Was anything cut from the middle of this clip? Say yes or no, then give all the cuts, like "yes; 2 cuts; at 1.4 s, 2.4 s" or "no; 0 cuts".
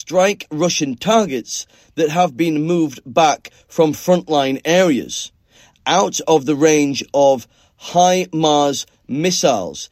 no; 0 cuts